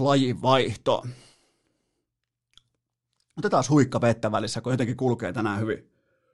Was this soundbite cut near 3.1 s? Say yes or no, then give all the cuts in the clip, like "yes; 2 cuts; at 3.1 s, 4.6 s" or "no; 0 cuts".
no; 0 cuts